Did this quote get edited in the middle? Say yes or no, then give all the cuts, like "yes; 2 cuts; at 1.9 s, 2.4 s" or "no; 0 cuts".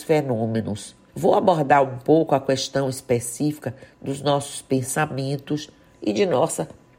yes; 1 cut; at 1.1 s